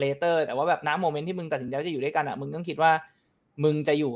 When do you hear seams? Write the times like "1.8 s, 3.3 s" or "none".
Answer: none